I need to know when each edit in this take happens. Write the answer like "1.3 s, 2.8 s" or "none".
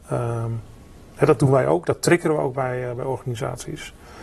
none